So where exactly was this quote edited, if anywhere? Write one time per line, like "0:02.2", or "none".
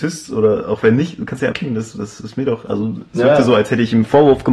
0:01.5